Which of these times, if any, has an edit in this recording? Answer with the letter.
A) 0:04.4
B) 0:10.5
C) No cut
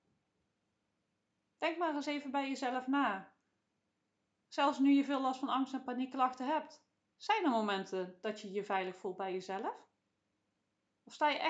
C